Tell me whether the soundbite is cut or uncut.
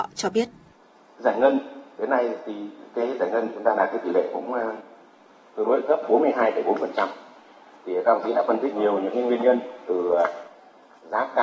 cut